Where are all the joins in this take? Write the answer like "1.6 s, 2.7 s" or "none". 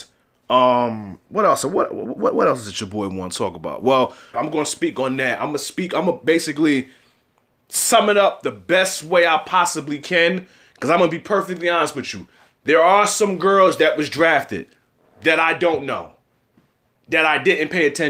4.3 s